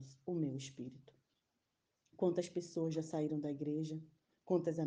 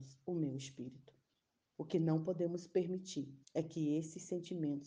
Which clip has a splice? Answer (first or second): second